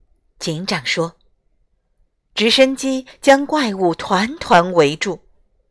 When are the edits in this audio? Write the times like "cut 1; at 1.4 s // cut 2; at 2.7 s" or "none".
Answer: none